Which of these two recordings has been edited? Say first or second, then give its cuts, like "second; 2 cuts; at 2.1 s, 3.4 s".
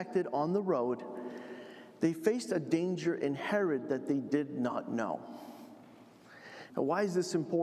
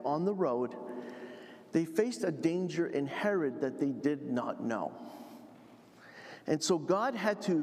first; 1 cut; at 6.7 s